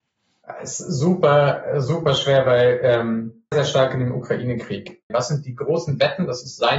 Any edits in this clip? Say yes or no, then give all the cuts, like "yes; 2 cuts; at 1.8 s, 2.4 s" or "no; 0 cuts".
yes; 2 cuts; at 3.5 s, 5.1 s